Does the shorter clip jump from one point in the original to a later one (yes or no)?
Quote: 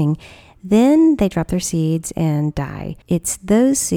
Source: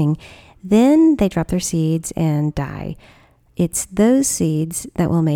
yes